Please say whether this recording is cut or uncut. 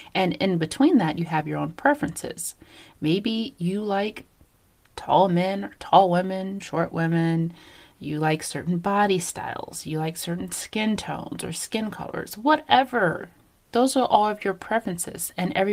cut